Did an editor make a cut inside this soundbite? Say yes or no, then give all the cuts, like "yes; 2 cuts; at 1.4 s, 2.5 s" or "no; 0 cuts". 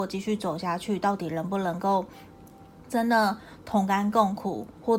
no; 0 cuts